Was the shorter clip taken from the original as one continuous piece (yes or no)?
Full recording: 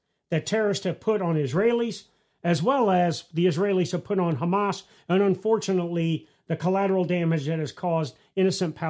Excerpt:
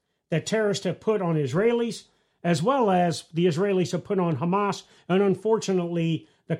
yes